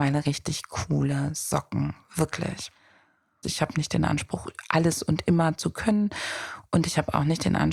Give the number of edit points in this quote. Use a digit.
1